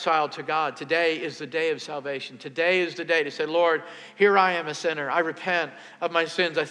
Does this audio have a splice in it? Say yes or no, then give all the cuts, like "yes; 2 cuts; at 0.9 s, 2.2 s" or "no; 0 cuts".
no; 0 cuts